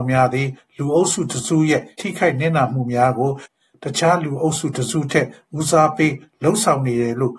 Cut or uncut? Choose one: cut